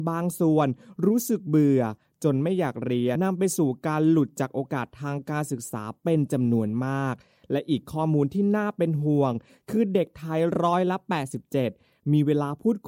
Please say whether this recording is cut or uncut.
cut